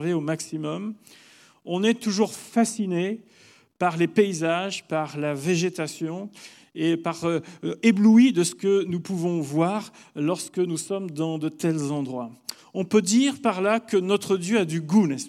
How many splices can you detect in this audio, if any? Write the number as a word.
zero